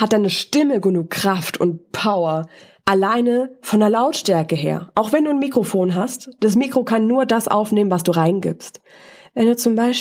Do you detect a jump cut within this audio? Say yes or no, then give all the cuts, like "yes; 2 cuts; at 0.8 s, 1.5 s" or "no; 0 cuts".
no; 0 cuts